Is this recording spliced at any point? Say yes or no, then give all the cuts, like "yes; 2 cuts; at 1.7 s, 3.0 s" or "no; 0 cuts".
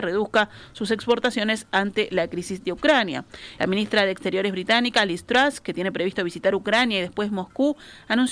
yes; 1 cut; at 3.6 s